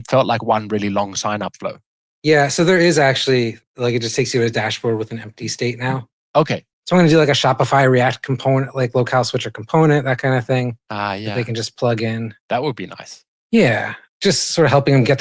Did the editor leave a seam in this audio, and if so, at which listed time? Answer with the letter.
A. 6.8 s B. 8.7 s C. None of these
A